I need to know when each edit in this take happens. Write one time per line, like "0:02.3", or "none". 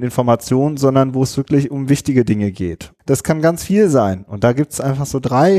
0:03.0
0:04.3